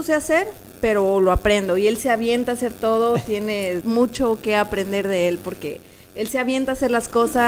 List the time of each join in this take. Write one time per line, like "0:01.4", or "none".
0:03.8